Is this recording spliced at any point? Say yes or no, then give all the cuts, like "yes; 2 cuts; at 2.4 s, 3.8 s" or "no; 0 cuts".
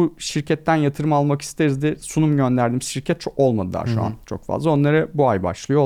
no; 0 cuts